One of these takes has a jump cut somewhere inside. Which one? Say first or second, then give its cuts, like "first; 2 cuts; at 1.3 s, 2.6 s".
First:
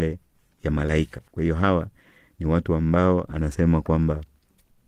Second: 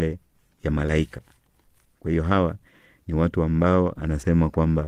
first; 1 cut; at 1.3 s